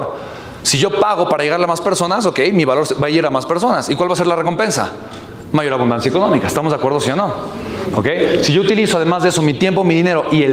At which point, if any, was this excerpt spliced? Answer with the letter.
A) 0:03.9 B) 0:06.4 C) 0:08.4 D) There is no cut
D